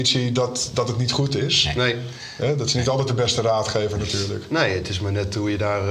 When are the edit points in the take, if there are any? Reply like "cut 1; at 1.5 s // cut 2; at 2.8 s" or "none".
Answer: none